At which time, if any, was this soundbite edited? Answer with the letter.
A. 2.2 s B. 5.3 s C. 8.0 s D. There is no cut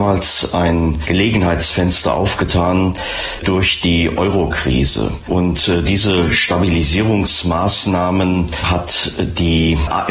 B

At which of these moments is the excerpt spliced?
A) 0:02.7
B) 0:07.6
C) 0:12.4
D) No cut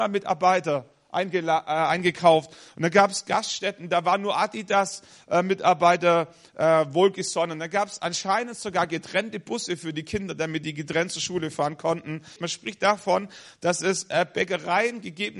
C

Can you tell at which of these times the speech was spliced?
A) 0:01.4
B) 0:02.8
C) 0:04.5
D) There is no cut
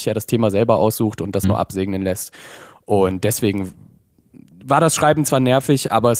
A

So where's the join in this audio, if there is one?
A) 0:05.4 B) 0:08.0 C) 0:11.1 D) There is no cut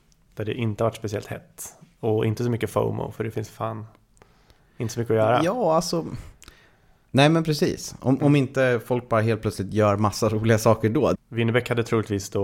C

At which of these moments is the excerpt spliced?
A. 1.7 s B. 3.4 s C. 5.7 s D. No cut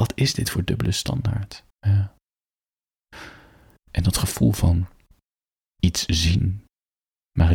A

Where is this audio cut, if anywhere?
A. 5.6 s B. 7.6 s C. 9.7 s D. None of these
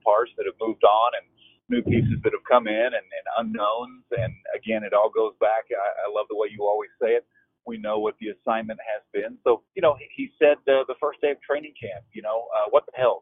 C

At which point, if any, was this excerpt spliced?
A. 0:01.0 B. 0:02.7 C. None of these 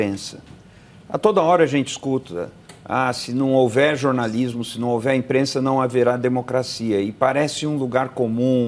C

